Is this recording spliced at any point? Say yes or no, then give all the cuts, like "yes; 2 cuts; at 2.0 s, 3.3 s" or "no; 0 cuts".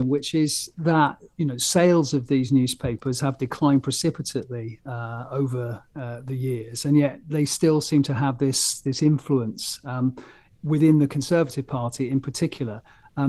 no; 0 cuts